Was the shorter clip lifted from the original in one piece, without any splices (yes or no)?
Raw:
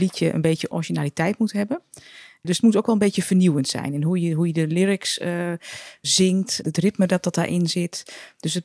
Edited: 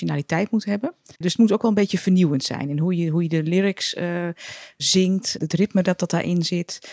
no